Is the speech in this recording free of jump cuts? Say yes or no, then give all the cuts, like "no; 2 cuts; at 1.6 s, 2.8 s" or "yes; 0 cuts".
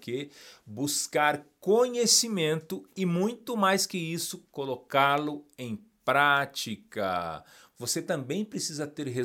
no; 1 cut; at 7.7 s